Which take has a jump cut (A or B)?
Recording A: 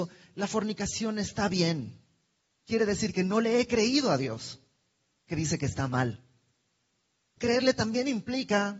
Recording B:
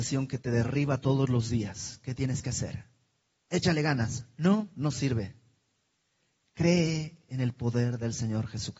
A